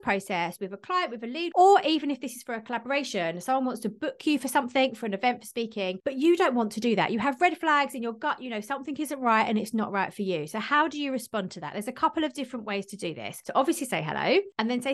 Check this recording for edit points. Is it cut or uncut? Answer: cut